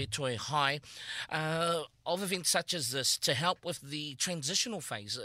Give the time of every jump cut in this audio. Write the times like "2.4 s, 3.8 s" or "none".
none